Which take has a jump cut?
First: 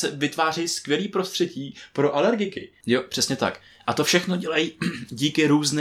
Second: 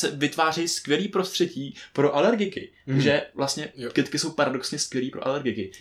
first; 1 cut; at 2.8 s

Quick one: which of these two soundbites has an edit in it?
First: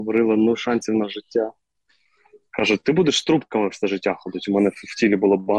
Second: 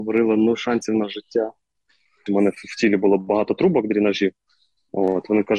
second; 1 cut; at 2.3 s

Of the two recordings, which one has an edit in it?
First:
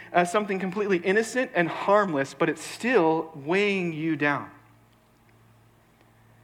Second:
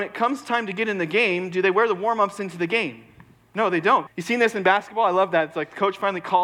second; 1 cut; at 4.1 s

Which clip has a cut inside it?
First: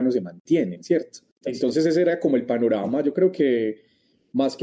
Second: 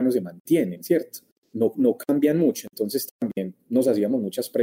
first; 1 cut; at 1.4 s

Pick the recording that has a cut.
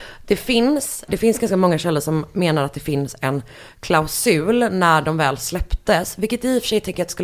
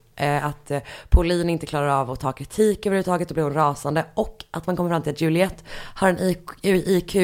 first; 1 cut; at 1.1 s

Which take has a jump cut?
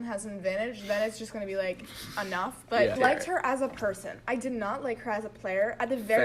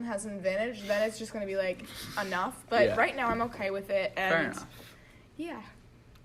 first; 1 cut; at 3.0 s

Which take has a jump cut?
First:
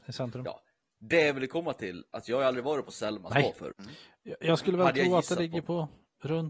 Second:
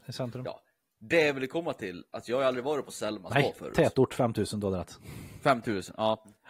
first; 1 cut; at 3.7 s

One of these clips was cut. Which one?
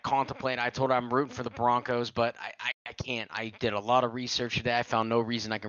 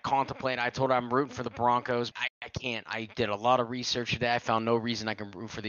second; 1 cut; at 2.1 s

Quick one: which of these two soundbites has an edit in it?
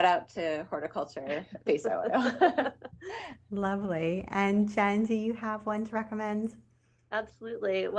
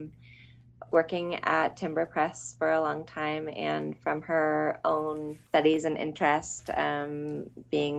second; 1 cut; at 5.5 s

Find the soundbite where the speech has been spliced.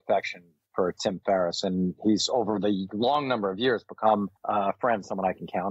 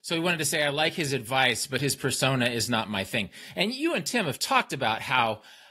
first; 1 cut; at 4.4 s

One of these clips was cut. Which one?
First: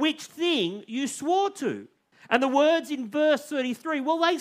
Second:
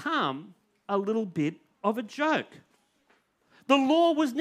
first; 1 cut; at 2.1 s

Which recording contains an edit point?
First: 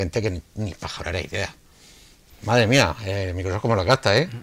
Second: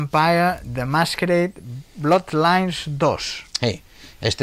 first; 1 cut; at 2.3 s

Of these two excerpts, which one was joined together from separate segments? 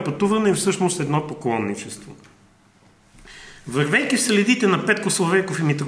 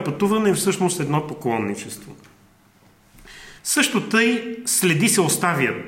second; 1 cut; at 3.6 s

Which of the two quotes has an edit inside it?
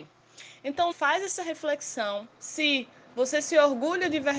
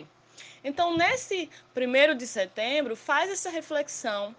first; 2 cuts; at 0.9 s, 2.3 s

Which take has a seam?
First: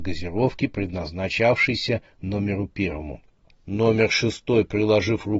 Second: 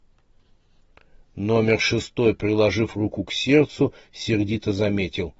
first; 1 cut; at 3.5 s

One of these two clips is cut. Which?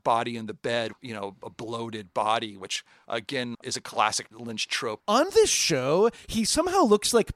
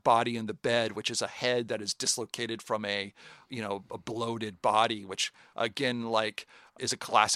first; 3 cuts; at 0.9 s, 3.5 s, 5.0 s

